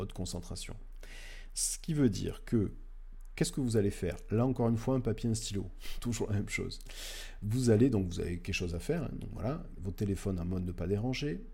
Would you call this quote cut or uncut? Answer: cut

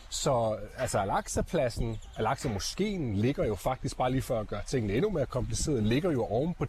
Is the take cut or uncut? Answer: uncut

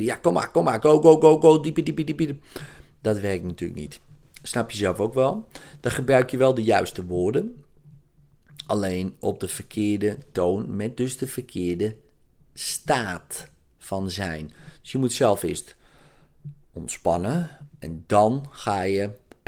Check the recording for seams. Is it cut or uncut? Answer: uncut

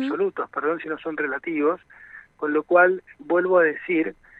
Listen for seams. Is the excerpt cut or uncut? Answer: uncut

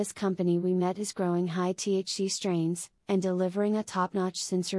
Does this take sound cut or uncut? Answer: cut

